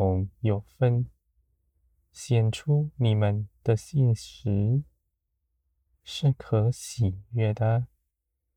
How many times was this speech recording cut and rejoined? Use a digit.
1